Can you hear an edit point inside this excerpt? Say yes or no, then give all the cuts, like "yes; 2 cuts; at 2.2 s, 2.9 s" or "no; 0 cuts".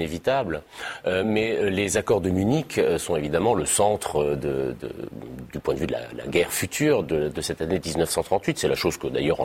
no; 0 cuts